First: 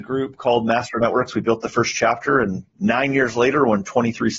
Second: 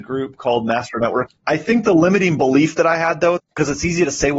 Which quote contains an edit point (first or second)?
second